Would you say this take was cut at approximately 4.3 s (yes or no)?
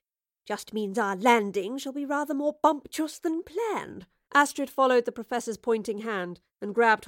yes